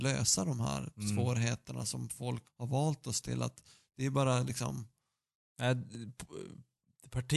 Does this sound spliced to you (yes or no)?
yes